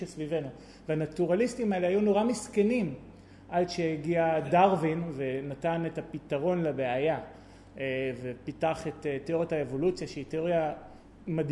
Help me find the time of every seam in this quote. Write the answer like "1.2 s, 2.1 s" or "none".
none